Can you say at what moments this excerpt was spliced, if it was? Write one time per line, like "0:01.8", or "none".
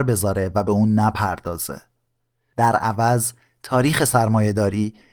none

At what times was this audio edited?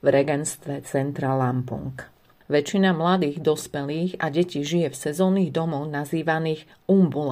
0:02.4

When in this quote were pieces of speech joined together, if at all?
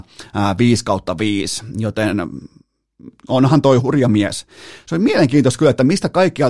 0:03.8

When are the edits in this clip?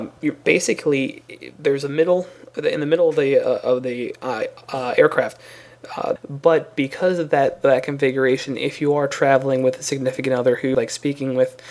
0:06.2
0:10.7

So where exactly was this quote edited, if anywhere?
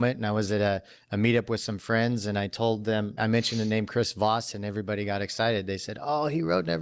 0:03.2

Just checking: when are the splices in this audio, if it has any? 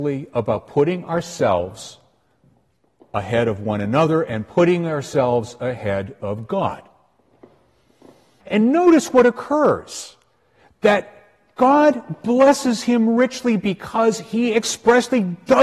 0:08.4

